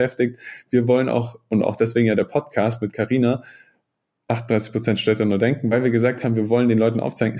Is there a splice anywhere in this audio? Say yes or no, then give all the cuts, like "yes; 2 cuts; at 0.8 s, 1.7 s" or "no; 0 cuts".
no; 0 cuts